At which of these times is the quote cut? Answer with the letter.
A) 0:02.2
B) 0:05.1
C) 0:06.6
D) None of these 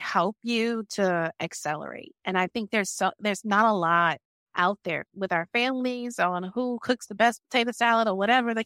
B